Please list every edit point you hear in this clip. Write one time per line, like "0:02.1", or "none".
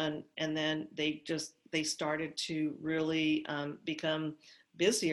none